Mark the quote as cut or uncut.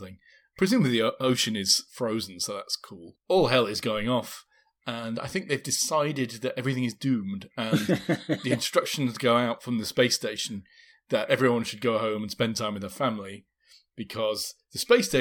cut